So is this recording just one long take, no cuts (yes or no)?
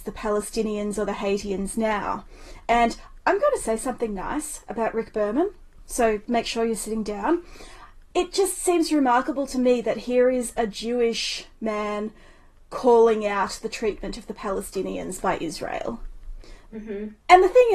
no